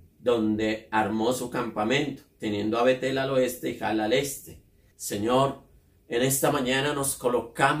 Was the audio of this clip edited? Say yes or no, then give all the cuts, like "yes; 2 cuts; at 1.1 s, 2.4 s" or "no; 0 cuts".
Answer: yes; 1 cut; at 4.9 s